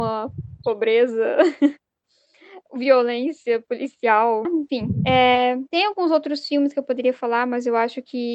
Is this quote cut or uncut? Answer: cut